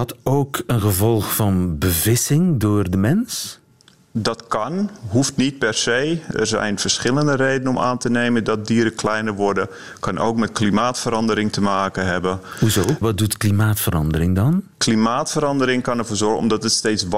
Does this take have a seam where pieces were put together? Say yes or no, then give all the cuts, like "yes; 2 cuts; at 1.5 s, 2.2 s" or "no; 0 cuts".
yes; 1 cut; at 14.7 s